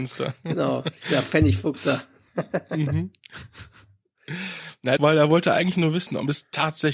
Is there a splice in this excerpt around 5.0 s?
yes; 1 cut; at 5.0 s

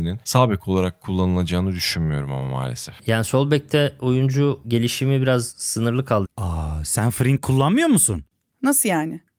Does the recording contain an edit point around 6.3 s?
yes; 2 cuts; at 3.0 s, 6.3 s

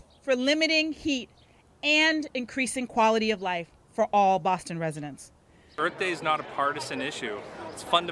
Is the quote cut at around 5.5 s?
no; 0 cuts

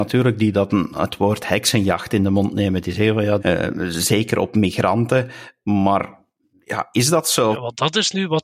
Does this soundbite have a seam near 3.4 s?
yes; 2 cuts; at 3.4 s, 7.5 s

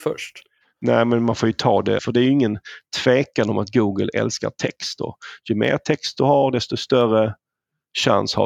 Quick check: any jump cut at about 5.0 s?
no; 1 cut; at 2.0 s

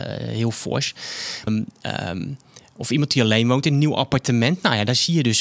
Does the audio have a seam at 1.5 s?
yes; 1 cut; at 1.5 s

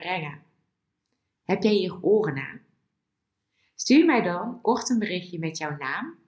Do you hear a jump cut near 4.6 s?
yes; 1 cut; at 4.6 s

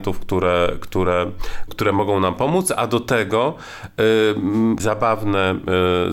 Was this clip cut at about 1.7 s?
yes; 2 cuts; at 1.7 s, 4.8 s

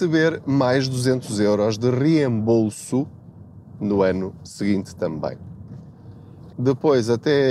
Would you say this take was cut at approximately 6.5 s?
yes; 1 cut; at 6.5 s

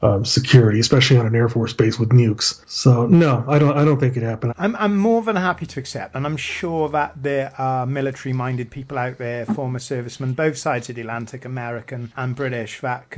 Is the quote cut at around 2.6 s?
no; 2 cuts; at 4.5 s, 12.1 s

